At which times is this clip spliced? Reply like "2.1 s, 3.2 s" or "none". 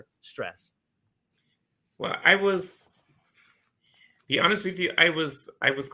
none